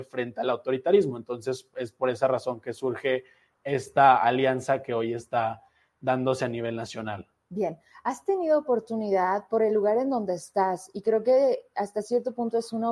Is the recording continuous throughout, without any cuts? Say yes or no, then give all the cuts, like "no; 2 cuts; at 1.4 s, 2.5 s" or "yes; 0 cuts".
yes; 0 cuts